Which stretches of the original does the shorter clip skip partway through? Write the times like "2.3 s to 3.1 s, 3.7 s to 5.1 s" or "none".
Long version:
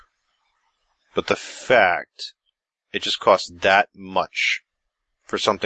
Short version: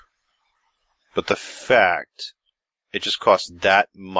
none